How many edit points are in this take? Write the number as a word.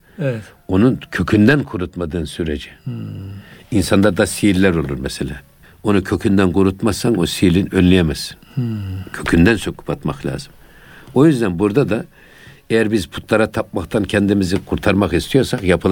one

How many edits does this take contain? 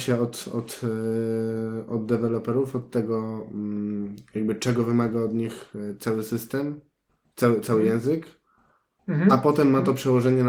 zero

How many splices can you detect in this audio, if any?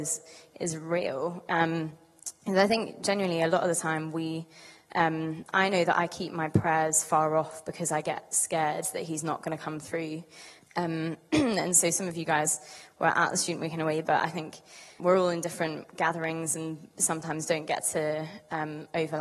two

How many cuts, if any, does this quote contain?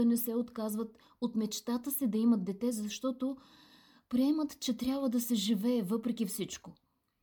zero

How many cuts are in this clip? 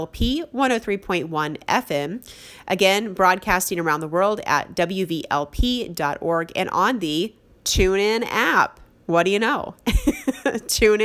zero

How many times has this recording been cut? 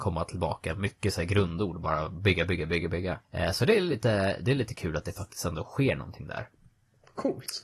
one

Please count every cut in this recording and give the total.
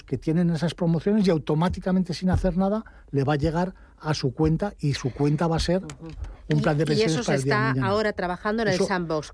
zero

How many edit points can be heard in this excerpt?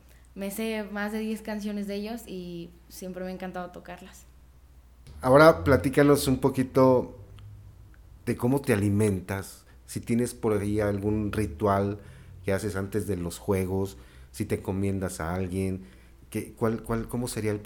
zero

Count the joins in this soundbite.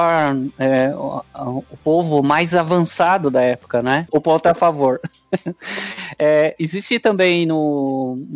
one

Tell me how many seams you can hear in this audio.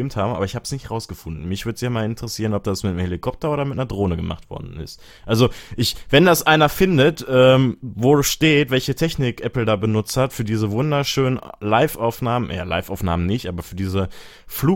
zero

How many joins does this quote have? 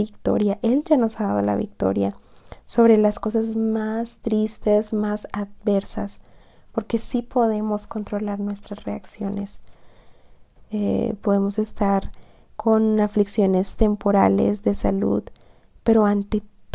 one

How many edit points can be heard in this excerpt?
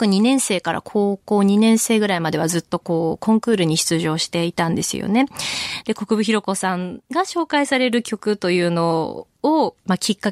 one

